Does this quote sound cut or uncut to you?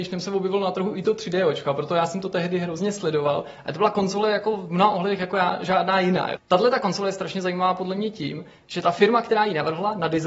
cut